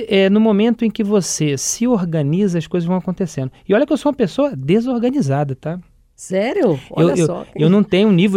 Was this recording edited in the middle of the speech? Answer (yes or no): no